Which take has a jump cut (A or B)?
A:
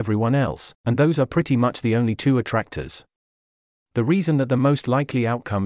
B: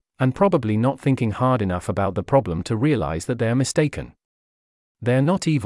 A